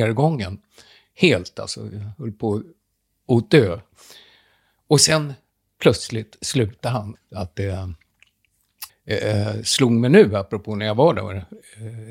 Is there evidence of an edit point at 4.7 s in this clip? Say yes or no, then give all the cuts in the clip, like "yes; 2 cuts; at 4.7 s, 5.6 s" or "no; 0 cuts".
no; 2 cuts; at 7.1 s, 8.9 s